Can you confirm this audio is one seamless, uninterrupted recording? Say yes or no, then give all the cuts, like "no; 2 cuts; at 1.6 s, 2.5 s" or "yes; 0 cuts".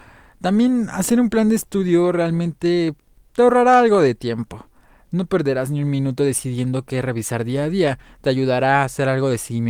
yes; 0 cuts